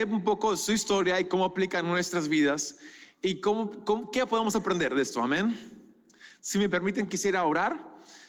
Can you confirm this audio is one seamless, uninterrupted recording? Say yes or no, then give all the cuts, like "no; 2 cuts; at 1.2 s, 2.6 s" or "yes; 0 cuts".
yes; 0 cuts